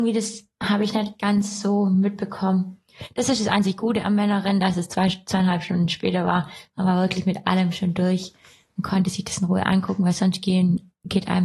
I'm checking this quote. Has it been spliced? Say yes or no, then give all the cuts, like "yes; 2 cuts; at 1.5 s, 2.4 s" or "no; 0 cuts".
no; 0 cuts